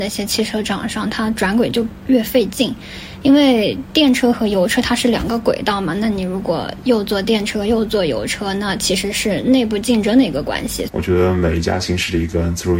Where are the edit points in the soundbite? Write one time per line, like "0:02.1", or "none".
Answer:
0:10.9